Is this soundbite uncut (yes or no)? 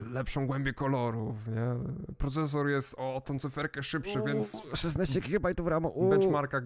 yes